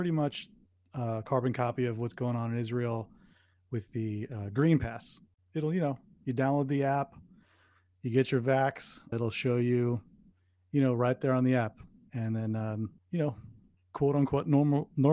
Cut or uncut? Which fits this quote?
cut